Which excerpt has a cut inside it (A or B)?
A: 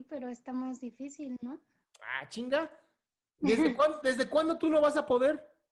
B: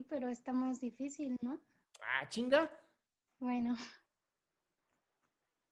B